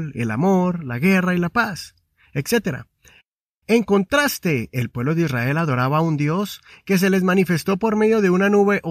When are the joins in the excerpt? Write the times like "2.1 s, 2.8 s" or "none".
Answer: 3.6 s